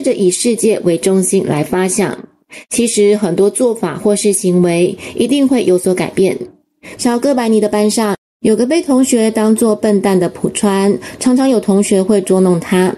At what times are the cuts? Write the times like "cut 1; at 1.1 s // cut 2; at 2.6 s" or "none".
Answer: cut 1; at 7.0 s